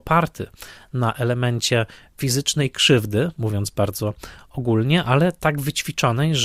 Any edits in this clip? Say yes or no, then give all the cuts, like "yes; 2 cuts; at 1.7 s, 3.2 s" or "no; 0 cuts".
no; 0 cuts